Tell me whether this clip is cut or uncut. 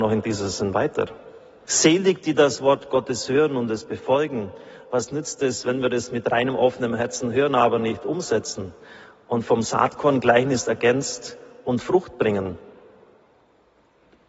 cut